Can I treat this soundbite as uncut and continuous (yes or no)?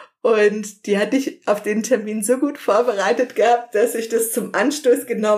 yes